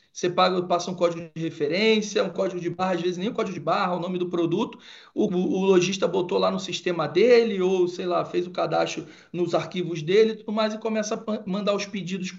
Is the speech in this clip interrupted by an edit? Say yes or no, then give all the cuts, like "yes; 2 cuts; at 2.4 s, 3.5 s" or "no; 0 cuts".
yes; 1 cut; at 5.3 s